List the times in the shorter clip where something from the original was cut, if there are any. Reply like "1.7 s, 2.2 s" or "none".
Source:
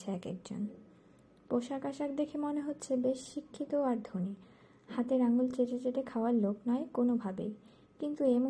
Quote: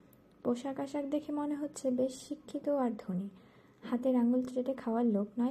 4.5 s